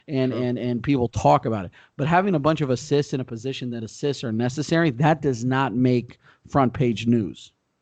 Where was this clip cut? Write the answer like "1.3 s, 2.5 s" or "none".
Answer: none